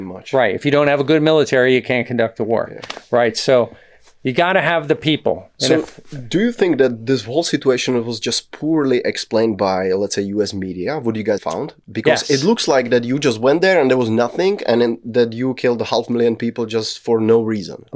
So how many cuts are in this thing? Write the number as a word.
one